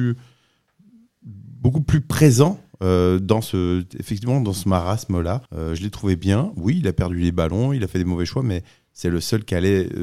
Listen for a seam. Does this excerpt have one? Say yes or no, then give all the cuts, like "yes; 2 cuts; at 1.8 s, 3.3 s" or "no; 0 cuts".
yes; 1 cut; at 5.5 s